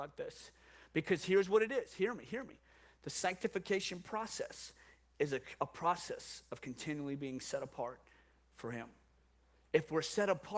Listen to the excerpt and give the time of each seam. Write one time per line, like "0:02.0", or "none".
none